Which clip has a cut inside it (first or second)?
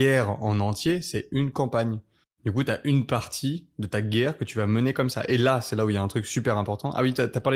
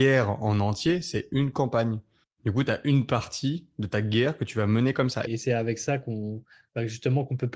second